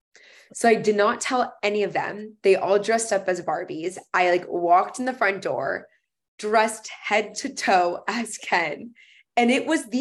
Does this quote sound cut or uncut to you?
uncut